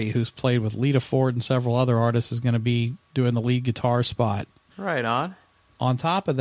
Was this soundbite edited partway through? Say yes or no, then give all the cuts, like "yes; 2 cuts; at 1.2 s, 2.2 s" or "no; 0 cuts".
yes; 1 cut; at 4.7 s